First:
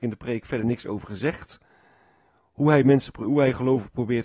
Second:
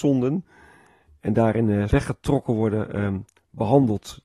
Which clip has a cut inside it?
second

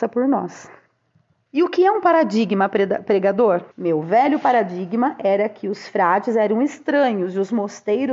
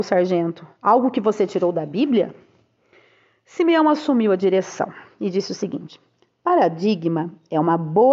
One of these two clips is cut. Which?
first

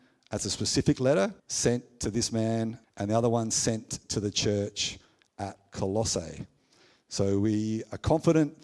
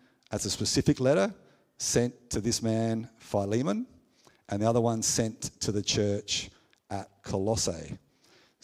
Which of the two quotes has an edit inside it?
first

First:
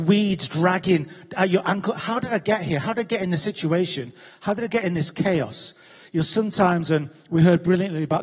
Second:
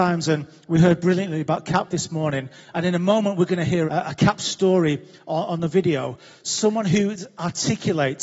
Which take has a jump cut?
second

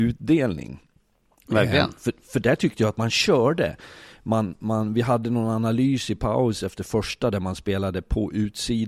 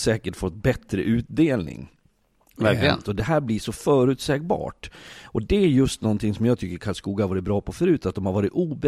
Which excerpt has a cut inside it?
second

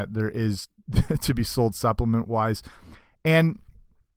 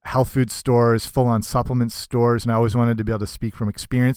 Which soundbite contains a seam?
second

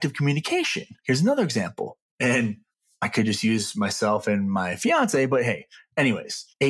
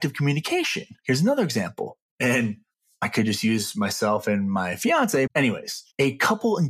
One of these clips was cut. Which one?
second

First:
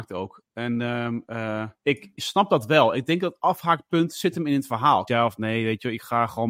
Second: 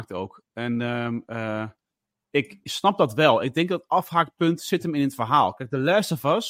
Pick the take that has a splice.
first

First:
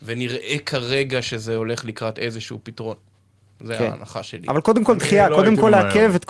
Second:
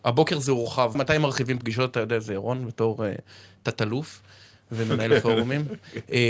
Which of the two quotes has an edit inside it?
second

